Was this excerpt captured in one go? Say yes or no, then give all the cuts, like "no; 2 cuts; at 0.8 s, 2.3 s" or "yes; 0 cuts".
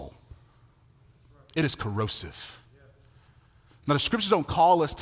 yes; 0 cuts